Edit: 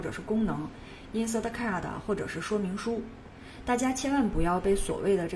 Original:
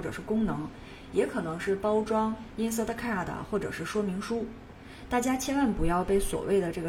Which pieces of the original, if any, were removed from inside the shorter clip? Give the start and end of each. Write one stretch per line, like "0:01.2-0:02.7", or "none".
0:01.1-0:02.5